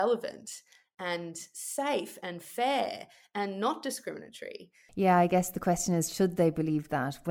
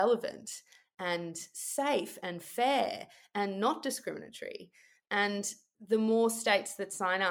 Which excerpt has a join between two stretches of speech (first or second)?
first